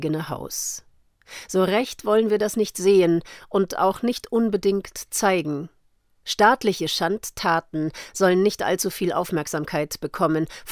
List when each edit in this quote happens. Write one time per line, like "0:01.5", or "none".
none